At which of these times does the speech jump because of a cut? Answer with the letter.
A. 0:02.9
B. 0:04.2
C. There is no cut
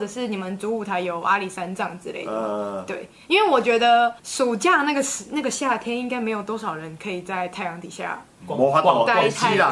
B